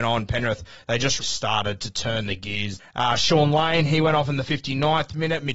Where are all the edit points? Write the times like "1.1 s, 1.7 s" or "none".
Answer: 1.2 s, 2.8 s